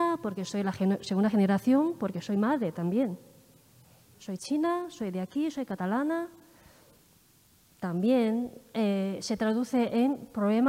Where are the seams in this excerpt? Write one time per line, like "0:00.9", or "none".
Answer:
0:04.1